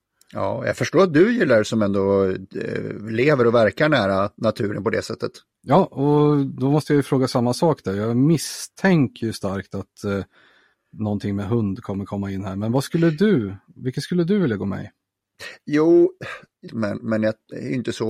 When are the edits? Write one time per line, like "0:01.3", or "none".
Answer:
0:05.6
0:16.7

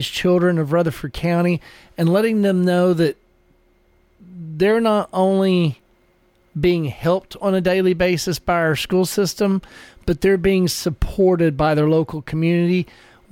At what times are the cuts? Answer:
none

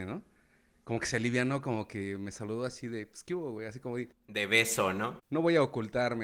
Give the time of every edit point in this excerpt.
0:05.2

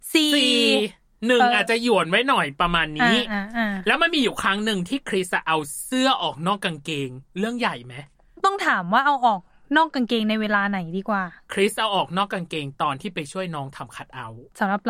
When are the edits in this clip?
none

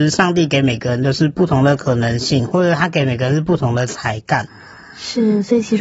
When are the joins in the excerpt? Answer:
none

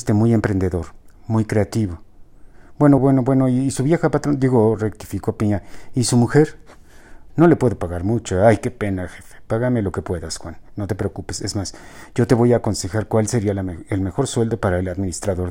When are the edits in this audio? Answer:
0:03.0
0:07.3

